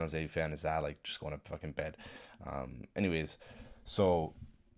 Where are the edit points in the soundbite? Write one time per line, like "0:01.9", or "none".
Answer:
none